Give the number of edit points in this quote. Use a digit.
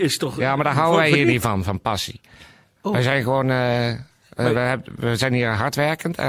0